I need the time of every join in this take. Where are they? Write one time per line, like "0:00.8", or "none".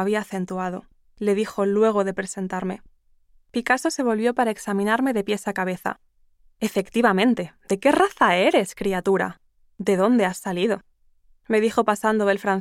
0:01.0